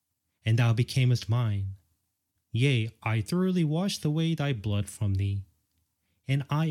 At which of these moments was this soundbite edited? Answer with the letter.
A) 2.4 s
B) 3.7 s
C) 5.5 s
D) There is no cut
A